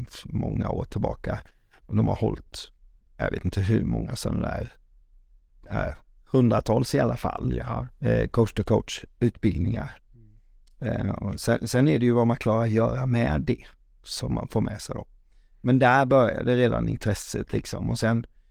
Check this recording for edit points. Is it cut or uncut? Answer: uncut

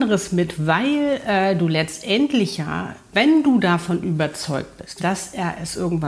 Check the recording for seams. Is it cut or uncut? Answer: cut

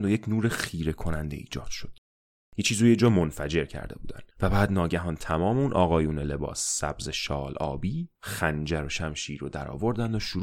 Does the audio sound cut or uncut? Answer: cut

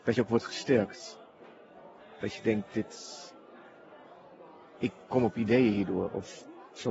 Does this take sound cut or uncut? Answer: uncut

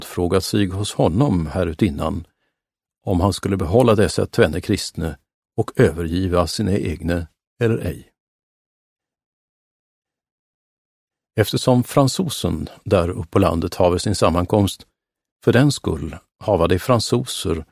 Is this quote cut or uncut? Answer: uncut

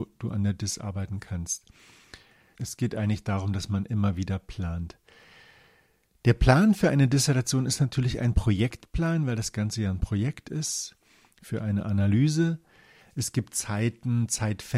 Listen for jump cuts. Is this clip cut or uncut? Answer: cut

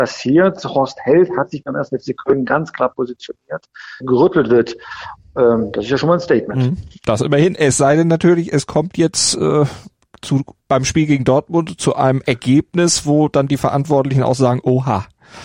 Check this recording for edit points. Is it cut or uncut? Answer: cut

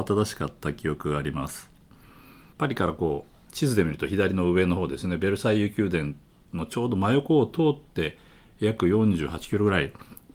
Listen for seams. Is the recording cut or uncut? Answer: cut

